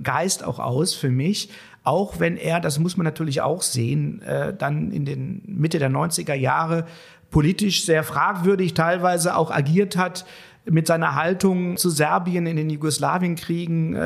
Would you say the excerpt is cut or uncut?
uncut